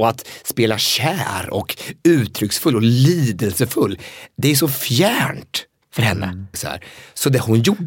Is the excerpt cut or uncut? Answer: cut